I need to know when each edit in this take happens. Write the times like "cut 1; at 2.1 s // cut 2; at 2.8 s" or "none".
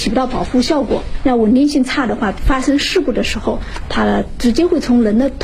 none